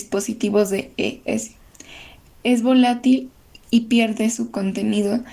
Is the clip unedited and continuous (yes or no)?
yes